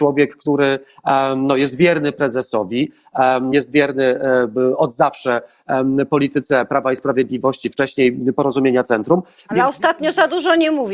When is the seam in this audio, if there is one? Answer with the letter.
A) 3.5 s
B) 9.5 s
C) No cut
A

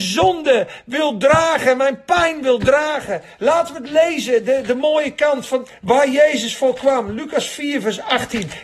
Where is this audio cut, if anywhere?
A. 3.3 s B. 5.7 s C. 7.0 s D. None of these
B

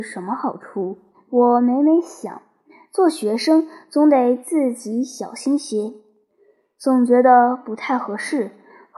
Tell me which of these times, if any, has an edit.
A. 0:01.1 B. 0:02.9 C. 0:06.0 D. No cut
A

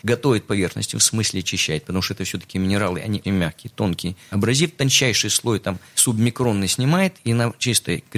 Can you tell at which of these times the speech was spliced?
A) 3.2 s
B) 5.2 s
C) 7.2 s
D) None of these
A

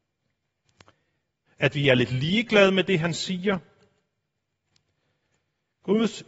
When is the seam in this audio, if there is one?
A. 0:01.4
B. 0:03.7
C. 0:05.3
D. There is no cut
A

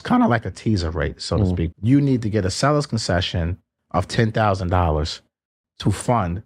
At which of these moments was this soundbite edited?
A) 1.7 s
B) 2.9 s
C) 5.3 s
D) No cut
A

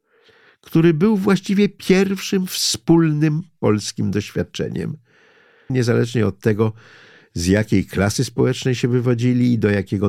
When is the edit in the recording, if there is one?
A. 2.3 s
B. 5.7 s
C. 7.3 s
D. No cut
B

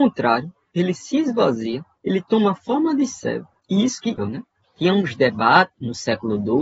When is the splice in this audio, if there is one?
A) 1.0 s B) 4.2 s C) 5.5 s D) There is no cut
B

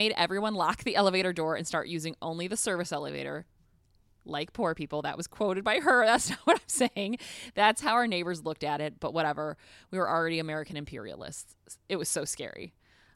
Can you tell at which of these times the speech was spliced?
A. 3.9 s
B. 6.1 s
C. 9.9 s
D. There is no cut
D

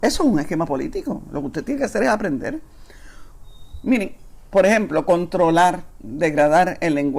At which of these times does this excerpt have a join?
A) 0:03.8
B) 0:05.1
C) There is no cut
C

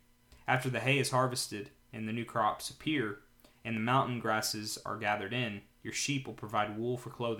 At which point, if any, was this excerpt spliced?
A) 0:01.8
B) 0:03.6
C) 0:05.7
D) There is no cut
D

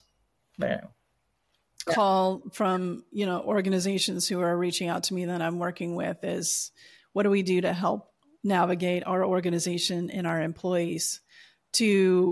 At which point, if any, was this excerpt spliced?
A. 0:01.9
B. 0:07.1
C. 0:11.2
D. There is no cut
A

